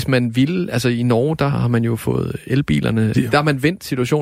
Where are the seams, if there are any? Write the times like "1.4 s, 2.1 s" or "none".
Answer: 1.5 s, 3.1 s

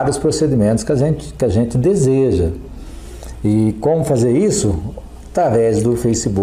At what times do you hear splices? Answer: none

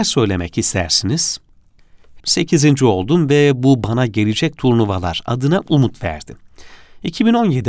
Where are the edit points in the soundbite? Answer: 2.2 s

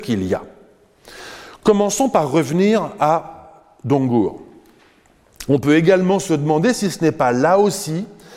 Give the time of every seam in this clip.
5.5 s

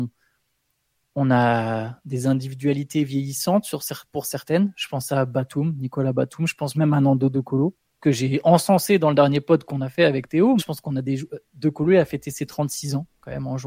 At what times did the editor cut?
10.6 s

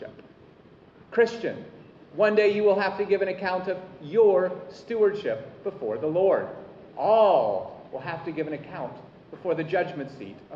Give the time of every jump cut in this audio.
6.9 s

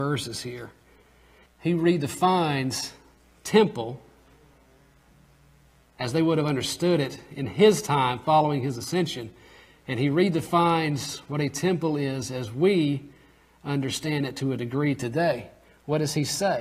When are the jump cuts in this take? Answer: 1.5 s

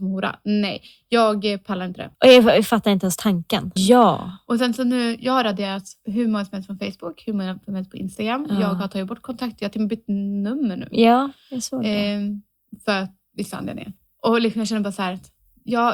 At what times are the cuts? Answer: 2.1 s, 3.8 s

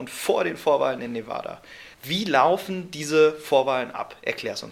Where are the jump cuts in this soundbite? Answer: 1.9 s

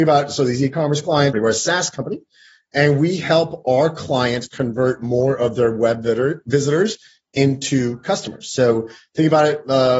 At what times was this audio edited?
1.3 s

